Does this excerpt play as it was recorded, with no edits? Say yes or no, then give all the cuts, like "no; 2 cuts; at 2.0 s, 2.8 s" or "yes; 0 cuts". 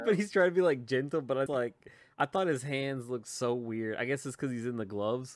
no; 1 cut; at 1.5 s